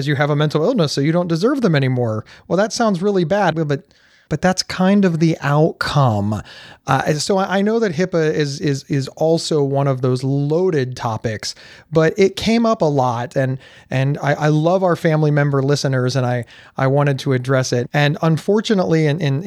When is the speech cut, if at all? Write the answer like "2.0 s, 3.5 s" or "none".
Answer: 3.5 s, 17.8 s